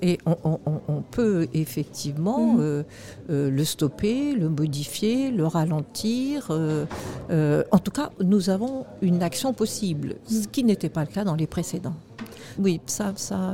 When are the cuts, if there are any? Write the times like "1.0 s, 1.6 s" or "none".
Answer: 12.6 s

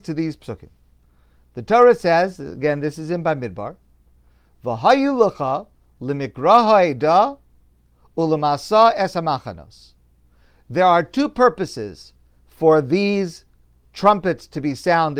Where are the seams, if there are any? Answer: none

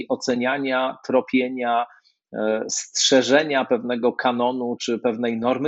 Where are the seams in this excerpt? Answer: 4.8 s

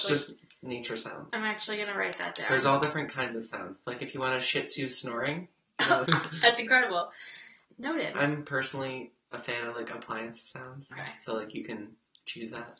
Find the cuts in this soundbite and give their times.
6.1 s, 7.6 s, 10.9 s

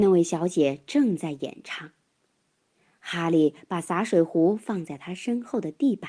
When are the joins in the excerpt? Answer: none

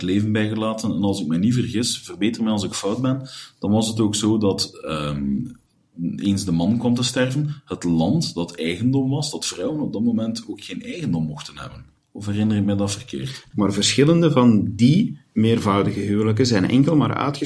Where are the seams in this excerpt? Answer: 13.5 s

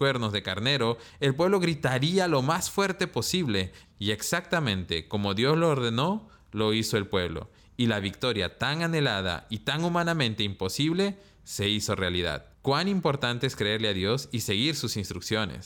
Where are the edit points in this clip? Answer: 3.8 s, 12.5 s

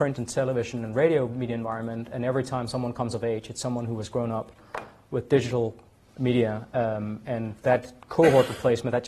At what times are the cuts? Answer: none

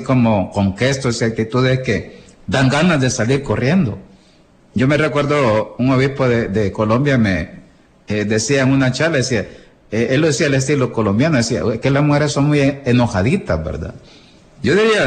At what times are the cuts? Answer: none

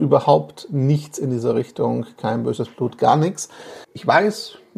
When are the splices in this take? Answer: 3.8 s

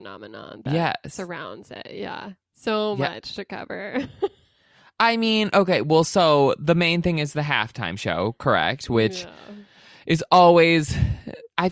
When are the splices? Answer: none

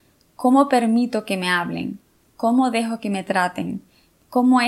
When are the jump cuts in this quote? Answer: none

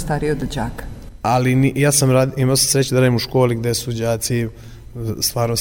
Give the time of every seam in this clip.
1.2 s

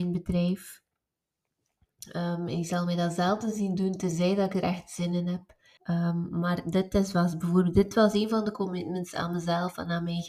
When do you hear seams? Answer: 5.8 s

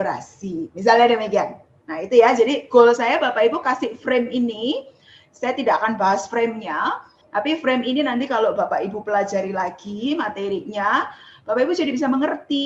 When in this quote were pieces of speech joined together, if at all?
7.2 s

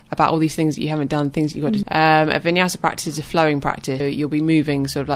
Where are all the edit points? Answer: 1.8 s, 4.0 s

